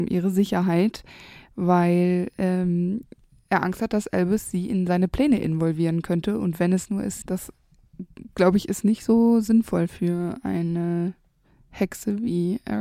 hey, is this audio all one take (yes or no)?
no